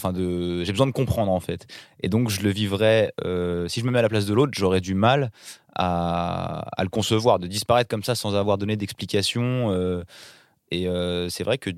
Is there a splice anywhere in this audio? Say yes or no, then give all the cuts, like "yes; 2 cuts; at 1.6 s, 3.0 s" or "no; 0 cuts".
no; 0 cuts